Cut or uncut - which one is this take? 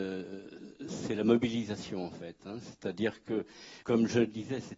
cut